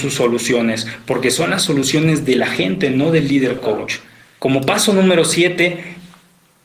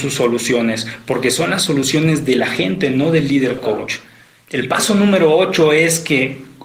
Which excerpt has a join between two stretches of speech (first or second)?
first